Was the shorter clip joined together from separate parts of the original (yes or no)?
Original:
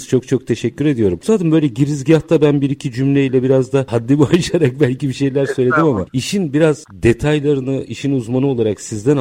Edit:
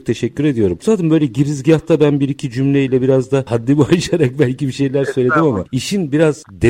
no